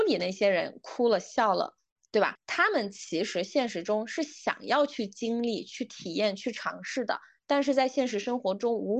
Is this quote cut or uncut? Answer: cut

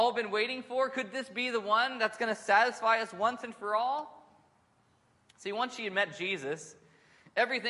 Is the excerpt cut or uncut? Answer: uncut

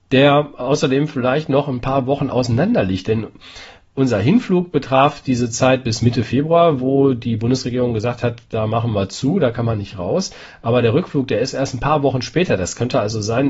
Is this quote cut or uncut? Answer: uncut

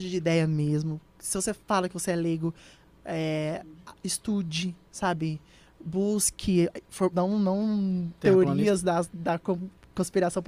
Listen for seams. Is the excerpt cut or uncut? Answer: cut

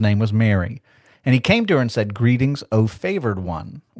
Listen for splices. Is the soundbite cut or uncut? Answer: uncut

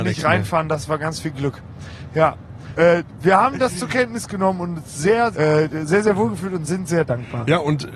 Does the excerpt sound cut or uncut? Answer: cut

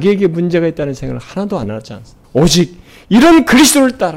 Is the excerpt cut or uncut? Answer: cut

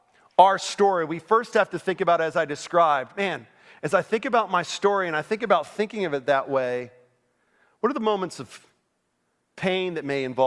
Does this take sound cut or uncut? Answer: uncut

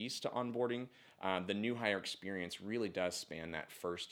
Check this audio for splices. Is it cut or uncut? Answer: uncut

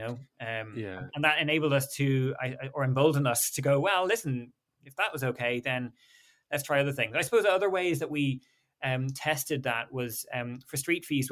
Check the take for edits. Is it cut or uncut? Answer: uncut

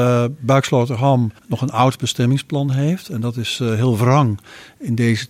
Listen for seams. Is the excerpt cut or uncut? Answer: cut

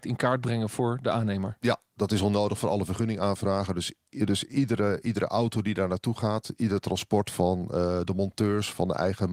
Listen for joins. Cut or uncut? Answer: uncut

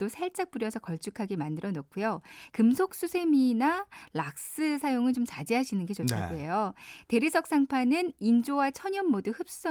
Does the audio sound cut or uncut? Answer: cut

